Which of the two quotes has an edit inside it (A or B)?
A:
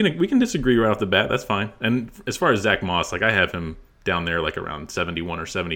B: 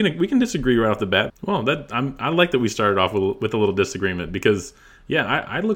B